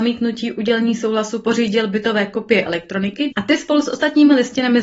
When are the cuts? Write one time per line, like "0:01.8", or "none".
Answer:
0:03.3